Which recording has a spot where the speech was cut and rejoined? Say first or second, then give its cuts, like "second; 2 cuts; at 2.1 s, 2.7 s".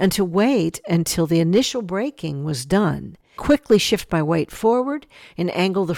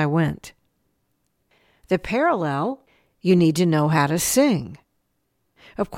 first; 1 cut; at 3.4 s